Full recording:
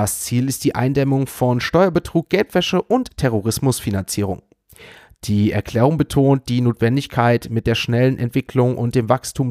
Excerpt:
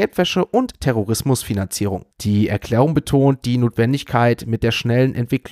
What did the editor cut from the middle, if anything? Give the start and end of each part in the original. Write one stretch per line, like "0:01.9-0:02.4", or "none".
0:04.5-0:05.1